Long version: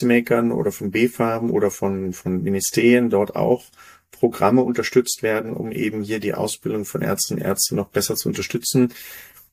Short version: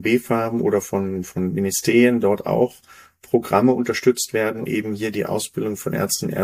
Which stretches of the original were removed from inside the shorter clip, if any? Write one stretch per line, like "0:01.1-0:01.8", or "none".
0:05.5-0:05.7